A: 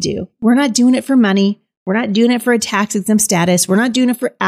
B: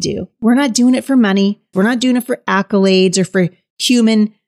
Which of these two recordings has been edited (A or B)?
B